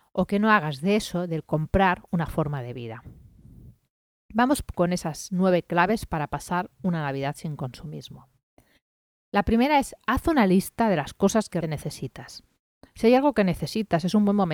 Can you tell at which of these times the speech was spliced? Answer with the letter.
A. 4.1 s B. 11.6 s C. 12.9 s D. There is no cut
B